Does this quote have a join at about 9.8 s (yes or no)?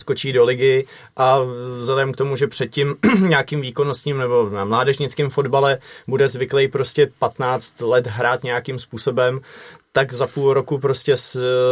no